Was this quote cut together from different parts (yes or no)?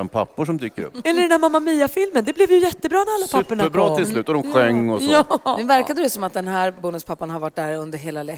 no